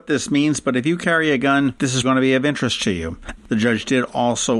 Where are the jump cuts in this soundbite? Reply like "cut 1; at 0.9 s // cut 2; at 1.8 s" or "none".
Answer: cut 1; at 2.0 s // cut 2; at 3.4 s